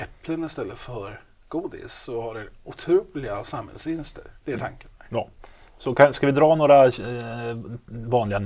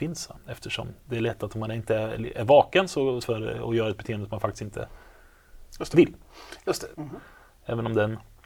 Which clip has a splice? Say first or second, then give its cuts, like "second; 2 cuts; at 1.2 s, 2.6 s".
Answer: second; 2 cuts; at 3.2 s, 6.9 s